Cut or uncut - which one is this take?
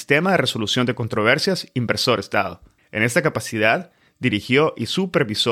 cut